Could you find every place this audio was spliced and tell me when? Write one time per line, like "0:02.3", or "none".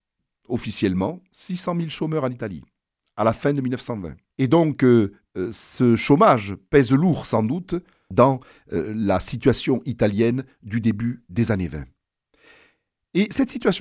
0:04.3